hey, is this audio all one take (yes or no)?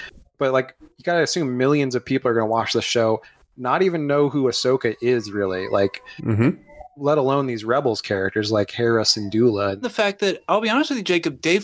no